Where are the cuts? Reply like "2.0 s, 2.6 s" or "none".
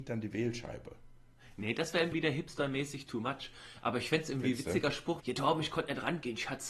2.1 s, 5.2 s